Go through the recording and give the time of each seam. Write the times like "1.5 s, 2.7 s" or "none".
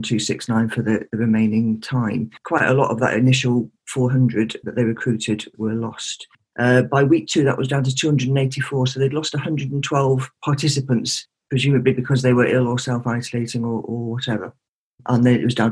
6.5 s